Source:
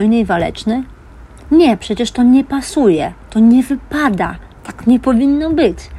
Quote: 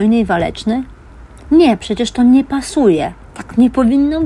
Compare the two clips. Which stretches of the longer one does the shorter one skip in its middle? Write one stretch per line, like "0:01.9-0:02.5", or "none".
0:03.3-0:04.5